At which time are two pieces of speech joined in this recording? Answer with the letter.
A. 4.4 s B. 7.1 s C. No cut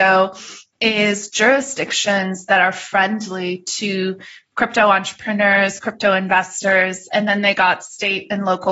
B